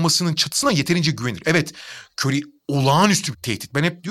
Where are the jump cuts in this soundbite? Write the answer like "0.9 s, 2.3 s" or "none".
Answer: none